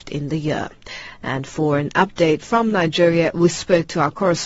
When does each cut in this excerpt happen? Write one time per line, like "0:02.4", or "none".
0:01.1